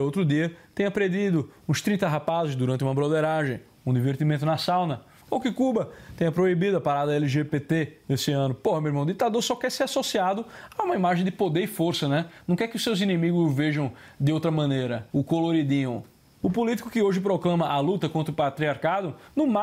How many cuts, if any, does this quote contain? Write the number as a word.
one